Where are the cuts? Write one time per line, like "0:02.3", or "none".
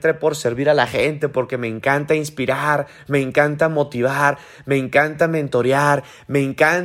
none